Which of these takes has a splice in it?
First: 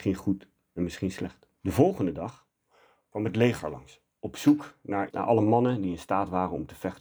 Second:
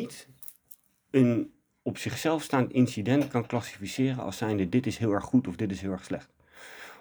first; 2 cuts; at 1.5 s, 5.1 s

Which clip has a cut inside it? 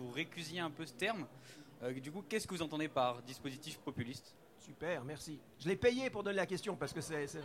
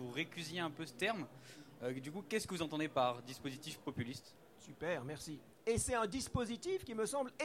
second; 1 cut; at 5.5 s

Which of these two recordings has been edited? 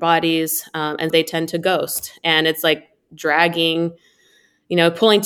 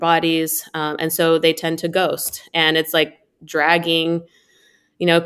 first; 1 cut; at 1.1 s

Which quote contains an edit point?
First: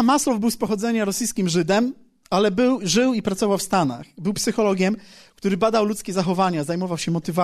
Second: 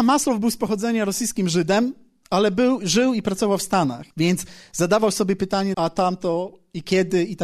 second; 2 cuts; at 4.1 s, 5.7 s

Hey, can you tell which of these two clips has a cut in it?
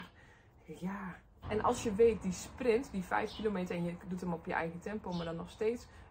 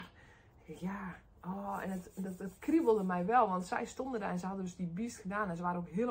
first; 1 cut; at 1.4 s

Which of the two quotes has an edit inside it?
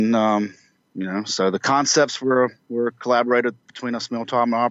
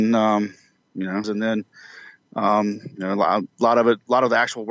second; 1 cut; at 1.2 s

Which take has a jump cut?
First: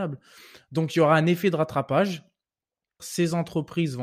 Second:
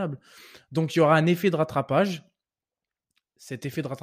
first; 1 cut; at 3.0 s

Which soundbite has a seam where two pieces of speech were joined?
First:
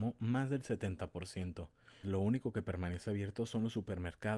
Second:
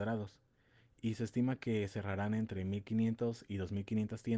first; 1 cut; at 2.0 s

